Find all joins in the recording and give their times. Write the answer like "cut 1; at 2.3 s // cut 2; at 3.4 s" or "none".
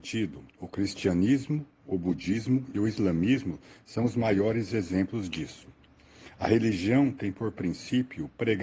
none